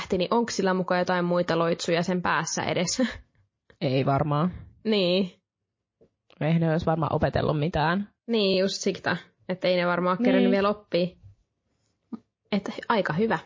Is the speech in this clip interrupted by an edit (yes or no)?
no